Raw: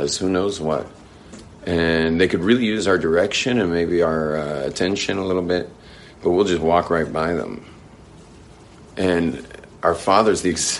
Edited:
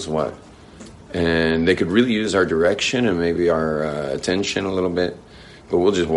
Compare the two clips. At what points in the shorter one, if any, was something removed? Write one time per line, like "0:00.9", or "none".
none